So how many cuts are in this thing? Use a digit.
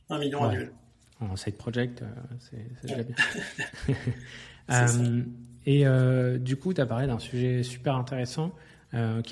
0